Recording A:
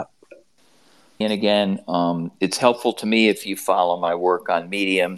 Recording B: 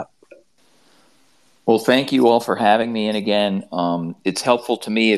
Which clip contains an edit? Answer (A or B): A